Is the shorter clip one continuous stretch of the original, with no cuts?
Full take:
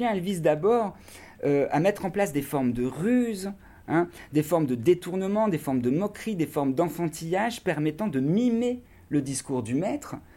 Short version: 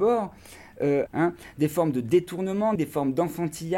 no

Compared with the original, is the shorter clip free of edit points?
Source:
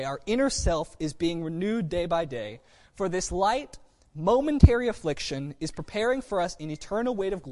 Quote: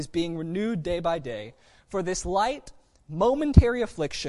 yes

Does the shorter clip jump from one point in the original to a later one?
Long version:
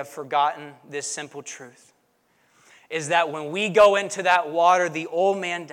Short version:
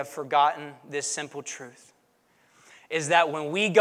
no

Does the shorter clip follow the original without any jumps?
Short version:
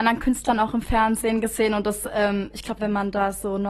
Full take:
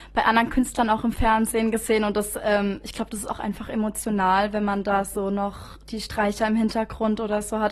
no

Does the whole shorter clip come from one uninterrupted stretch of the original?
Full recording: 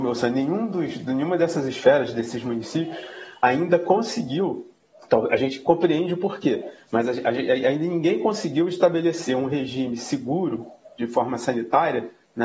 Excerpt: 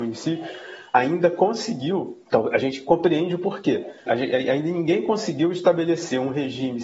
no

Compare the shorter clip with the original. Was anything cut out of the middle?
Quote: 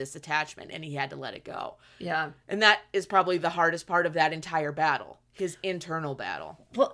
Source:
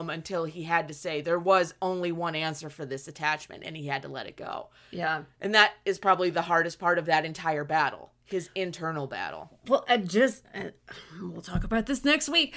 no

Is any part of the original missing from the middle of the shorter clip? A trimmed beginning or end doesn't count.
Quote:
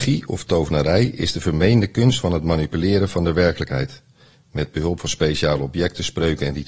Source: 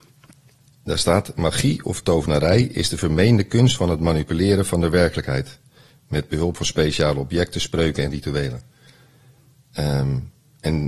no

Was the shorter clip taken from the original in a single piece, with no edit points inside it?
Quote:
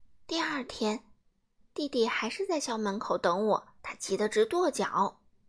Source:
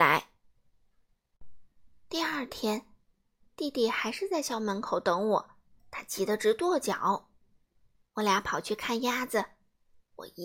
no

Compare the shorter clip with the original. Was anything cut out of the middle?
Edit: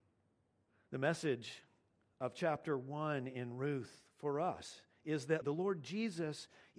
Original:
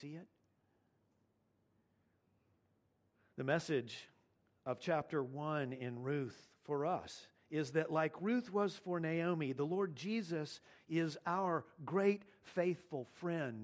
yes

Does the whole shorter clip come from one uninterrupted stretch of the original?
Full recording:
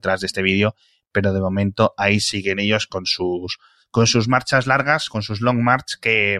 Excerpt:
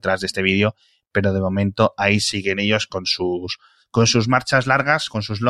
yes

